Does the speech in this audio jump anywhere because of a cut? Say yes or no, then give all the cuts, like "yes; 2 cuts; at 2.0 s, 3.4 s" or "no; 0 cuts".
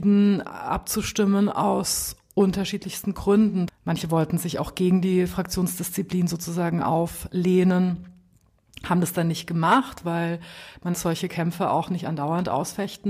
yes; 2 cuts; at 3.7 s, 10.9 s